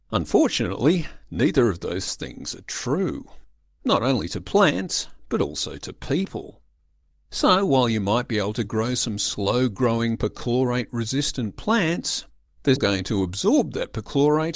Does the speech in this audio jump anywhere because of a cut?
yes; 2 cuts; at 3.7 s, 12.8 s

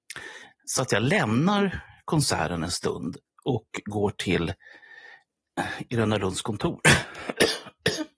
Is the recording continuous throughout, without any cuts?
yes; 0 cuts

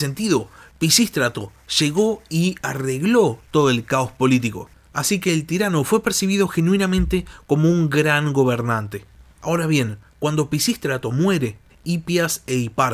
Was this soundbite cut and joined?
yes; 1 cut; at 11.7 s

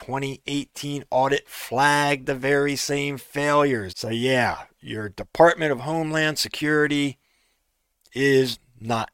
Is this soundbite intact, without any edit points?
no; 1 cut; at 3.9 s

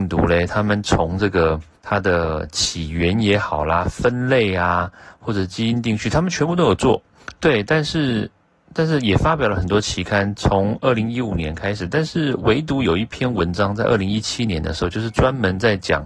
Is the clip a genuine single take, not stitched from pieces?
yes; 0 cuts

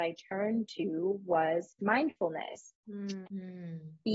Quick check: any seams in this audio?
yes; 1 cut; at 3.2 s

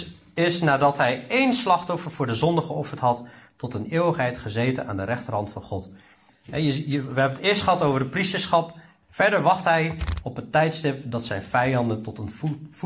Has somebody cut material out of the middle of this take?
yes; 2 cuts; at 6.3 s, 9.0 s

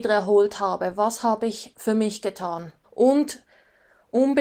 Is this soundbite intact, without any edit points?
no; 1 cut; at 2.8 s

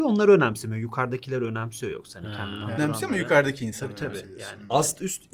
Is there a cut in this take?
yes; 1 cut; at 2.8 s

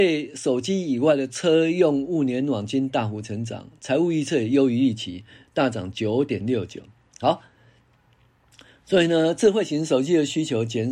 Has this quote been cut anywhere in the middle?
no; 0 cuts

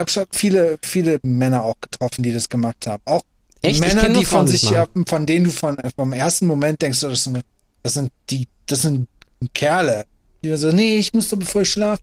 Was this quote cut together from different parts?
no; 0 cuts

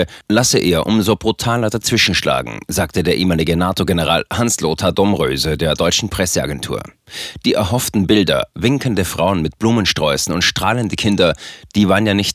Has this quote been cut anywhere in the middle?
no; 0 cuts

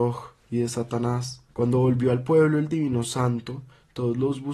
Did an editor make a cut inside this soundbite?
yes; 1 cut; at 1.5 s

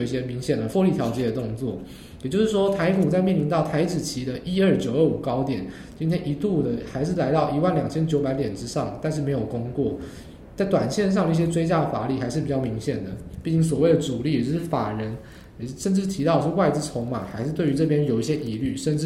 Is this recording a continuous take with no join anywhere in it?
yes; 0 cuts

